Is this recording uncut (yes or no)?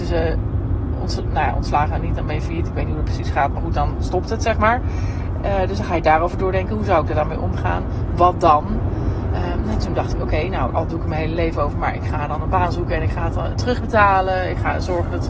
no